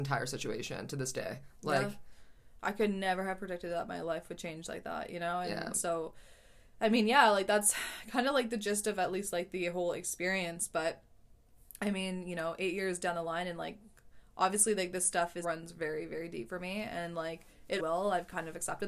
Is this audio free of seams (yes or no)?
no